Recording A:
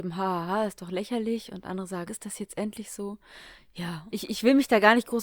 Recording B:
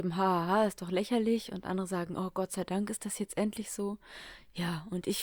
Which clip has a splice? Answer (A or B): A